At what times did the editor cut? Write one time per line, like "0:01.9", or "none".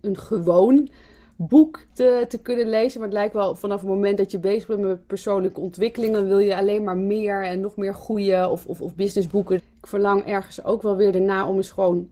0:01.9
0:09.6